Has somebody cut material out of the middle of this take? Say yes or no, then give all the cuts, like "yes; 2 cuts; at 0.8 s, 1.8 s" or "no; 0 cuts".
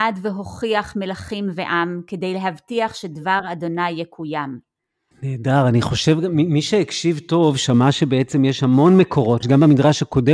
yes; 2 cuts; at 5.1 s, 9.4 s